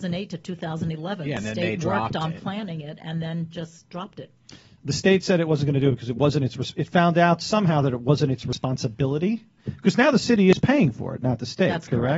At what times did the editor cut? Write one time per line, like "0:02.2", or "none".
none